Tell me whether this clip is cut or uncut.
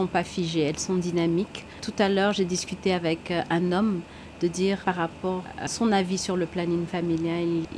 cut